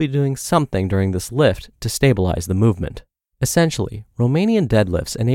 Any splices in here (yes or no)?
yes